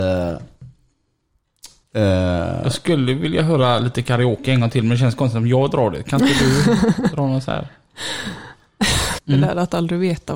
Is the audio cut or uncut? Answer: cut